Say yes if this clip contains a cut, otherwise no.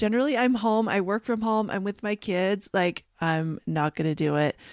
yes